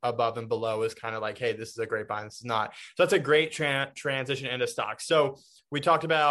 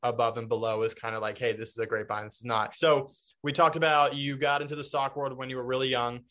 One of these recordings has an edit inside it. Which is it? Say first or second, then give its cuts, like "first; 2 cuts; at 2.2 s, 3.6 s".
second; 1 cut; at 2.7 s